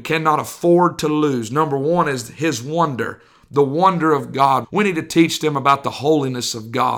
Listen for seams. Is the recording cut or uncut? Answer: cut